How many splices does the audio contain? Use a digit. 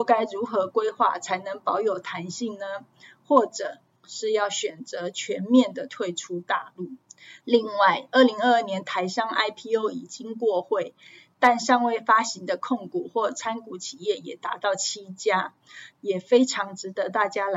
2